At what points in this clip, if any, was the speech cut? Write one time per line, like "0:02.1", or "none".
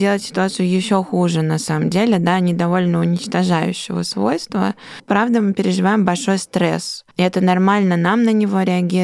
0:07.1